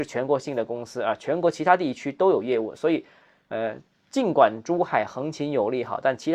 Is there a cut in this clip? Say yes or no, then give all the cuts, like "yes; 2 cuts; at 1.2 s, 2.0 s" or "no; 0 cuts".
no; 0 cuts